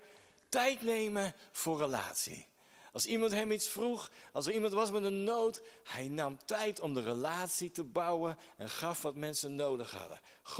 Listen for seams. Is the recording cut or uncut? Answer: uncut